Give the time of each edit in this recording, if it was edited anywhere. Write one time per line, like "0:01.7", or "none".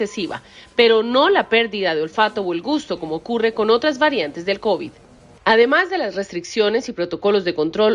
0:05.4